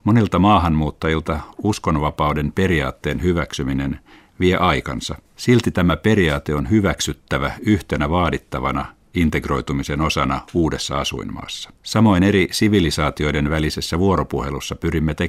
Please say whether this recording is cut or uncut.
cut